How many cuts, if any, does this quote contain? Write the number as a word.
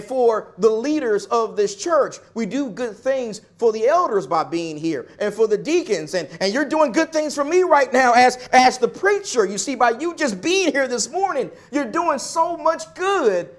zero